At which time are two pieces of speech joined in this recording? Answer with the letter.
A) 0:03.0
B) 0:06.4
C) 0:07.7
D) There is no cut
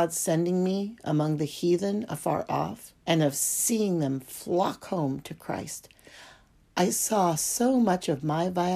A